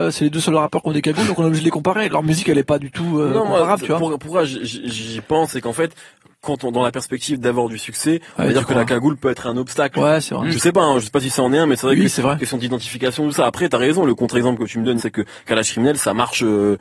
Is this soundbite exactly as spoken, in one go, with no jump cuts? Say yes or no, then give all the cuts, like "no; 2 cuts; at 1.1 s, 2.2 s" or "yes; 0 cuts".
no; 1 cut; at 15.0 s